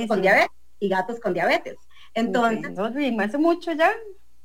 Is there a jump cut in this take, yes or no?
yes